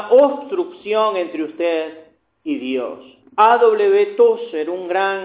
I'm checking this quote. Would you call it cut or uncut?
cut